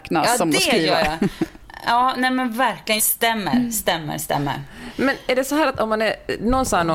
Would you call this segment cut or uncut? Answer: cut